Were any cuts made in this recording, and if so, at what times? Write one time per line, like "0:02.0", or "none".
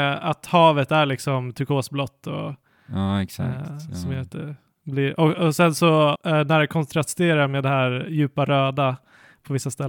0:06.1